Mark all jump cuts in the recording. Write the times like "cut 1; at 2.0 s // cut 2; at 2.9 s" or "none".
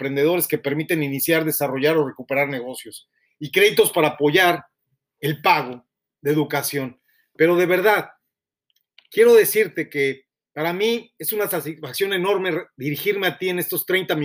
none